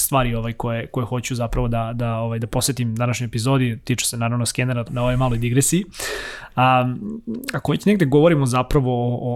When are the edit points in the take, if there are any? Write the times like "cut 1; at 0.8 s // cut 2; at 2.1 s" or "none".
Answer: cut 1; at 4.9 s